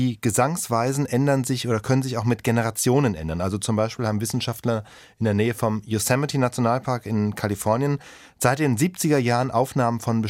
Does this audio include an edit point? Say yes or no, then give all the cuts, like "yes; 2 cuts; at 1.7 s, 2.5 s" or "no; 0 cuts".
no; 0 cuts